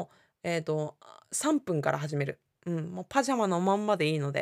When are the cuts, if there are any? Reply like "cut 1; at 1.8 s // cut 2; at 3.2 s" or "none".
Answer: none